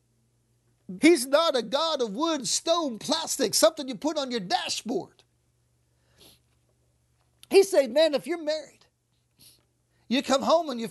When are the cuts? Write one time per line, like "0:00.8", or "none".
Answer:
0:01.0